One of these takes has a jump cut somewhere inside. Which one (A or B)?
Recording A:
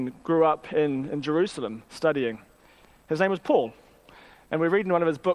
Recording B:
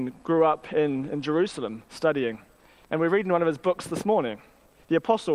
B